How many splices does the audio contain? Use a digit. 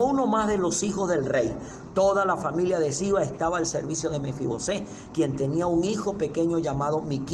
0